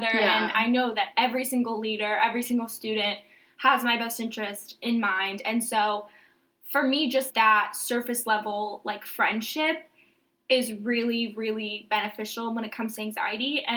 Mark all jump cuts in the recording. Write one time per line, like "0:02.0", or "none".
0:07.3

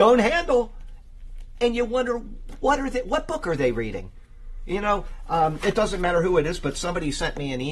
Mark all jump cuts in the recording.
none

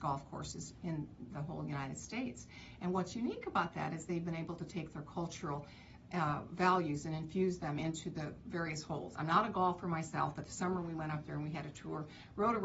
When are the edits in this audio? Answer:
none

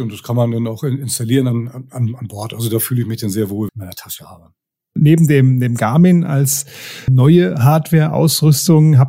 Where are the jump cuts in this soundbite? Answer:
0:03.7
0:07.1

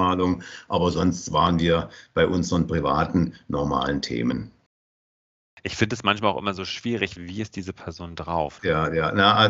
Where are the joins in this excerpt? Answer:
0:07.2
0:08.6

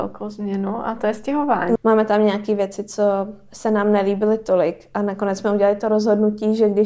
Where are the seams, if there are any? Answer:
0:01.8

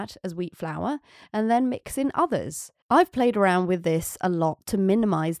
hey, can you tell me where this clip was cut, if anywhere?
0:02.8

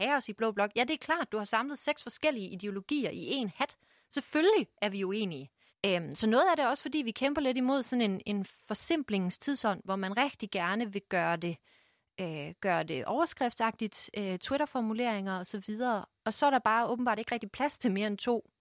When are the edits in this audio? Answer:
0:05.7

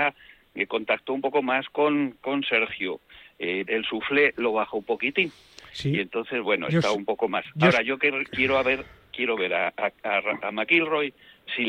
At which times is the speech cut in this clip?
0:03.6

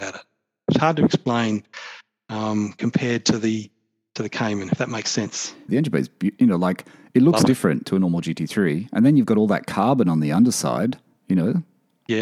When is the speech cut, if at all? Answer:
0:05.7

